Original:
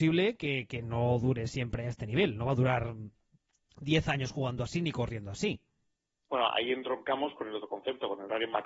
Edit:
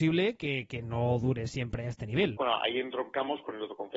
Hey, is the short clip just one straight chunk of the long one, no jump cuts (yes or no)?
no